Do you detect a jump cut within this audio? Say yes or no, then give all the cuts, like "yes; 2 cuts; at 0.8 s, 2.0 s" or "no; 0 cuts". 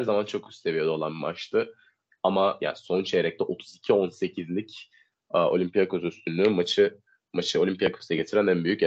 no; 0 cuts